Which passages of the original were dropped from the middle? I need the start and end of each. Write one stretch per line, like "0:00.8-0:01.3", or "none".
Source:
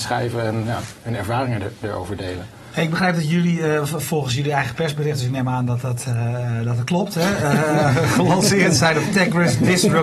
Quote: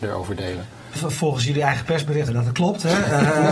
0:02.8-0:03.9
0:05.2-0:06.6

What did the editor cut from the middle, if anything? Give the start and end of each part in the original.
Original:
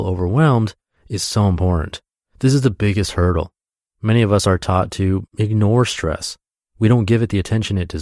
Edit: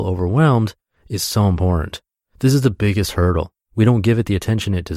0:03.6-0:06.7

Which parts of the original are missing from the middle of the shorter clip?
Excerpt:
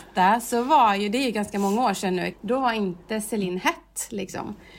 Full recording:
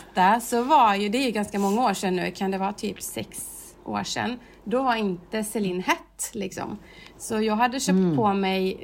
0:02.3-0:04.6

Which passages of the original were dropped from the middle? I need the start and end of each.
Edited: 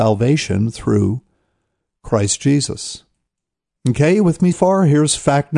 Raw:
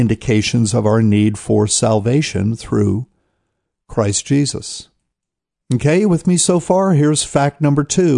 0:06.4-0:06.6

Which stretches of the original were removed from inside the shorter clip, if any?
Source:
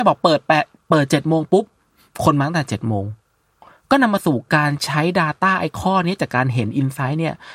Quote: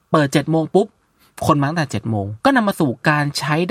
0:03.2-0:03.9

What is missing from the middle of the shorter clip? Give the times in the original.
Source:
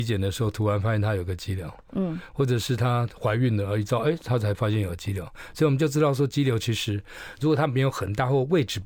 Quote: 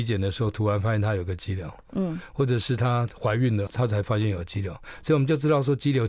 0:03.7-0:04.2

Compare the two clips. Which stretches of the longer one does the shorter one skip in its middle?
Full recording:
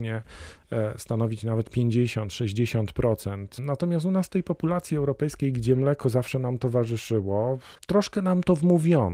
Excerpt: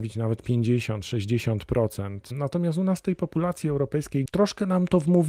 0:05.5-0:07.8

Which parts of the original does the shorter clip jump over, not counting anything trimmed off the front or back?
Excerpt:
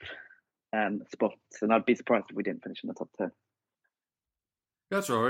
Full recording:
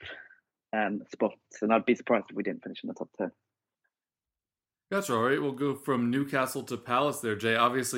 none

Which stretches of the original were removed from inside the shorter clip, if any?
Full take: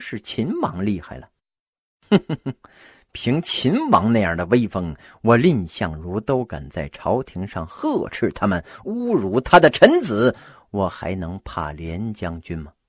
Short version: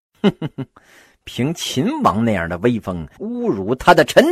0:05.0-0:08.8

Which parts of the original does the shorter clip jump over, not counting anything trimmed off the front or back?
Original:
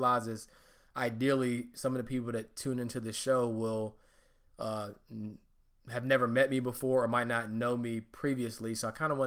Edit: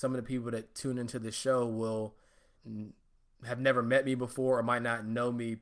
0:04.4-0:05.0

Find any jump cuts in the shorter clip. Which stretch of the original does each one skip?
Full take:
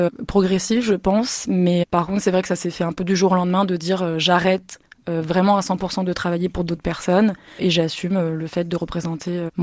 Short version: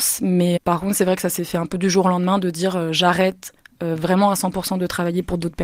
none

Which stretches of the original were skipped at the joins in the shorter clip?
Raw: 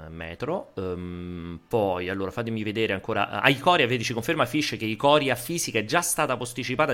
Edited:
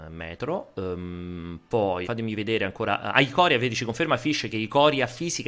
0:02.0-0:02.3

